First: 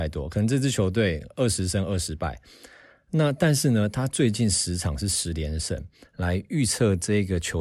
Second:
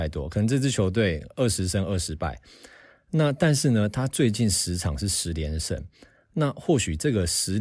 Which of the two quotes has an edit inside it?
first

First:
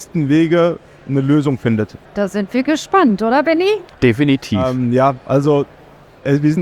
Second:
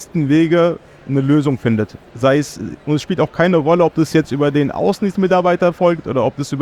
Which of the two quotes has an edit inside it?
first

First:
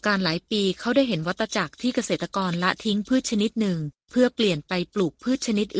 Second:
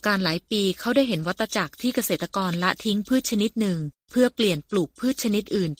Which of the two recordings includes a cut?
second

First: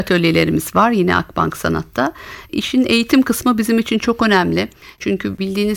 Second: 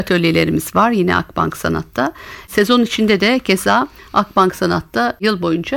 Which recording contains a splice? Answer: second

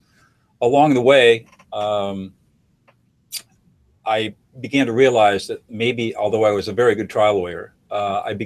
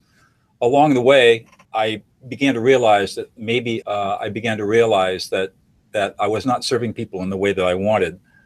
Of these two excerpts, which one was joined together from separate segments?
second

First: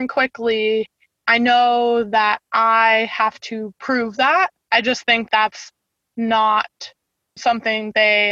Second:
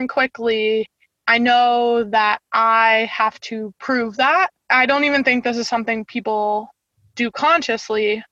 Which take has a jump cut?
first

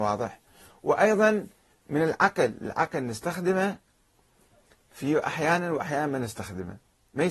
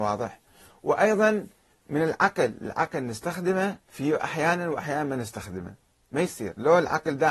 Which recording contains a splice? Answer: second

